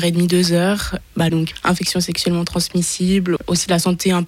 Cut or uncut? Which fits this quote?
cut